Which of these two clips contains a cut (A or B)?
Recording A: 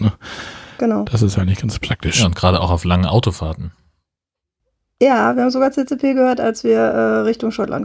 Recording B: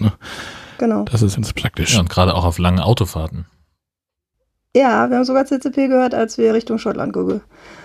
B